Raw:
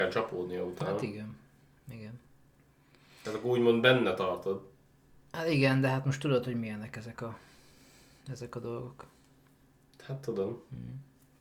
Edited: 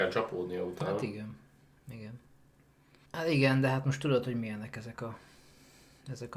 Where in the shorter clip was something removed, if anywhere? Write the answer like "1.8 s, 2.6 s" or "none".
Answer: 3.0 s